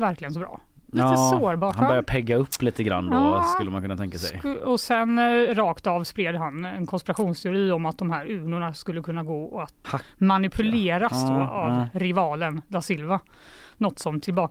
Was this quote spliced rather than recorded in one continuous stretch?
yes; 1 cut; at 9.8 s

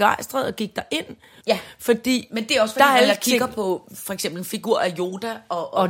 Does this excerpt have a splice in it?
yes; 1 cut; at 1.4 s

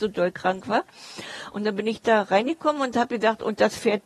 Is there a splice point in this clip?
no; 0 cuts

